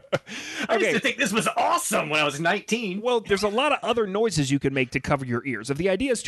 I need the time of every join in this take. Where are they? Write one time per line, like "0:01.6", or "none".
0:03.2